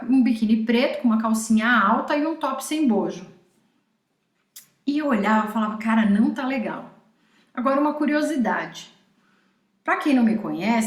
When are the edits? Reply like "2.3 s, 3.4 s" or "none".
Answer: none